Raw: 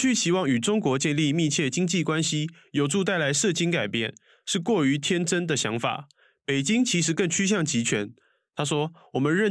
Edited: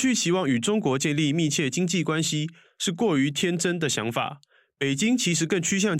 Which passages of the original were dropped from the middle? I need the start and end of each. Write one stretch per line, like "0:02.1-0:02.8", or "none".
0:02.6-0:04.3